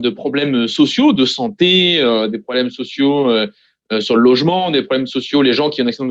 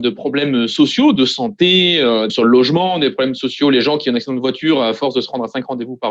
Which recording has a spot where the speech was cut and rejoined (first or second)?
second